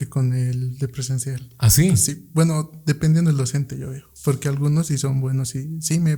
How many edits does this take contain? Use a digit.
0